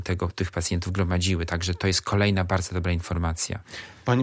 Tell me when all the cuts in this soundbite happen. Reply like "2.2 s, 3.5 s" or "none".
none